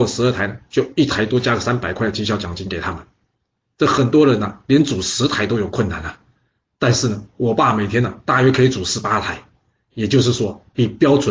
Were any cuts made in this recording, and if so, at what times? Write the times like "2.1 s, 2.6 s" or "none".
none